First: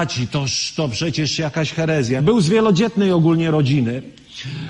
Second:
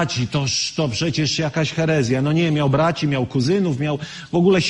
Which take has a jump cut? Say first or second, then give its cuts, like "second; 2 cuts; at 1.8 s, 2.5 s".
first; 1 cut; at 2.2 s